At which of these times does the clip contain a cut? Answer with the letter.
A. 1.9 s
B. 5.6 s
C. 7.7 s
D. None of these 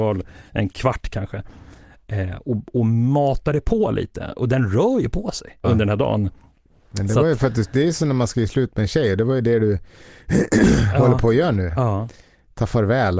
B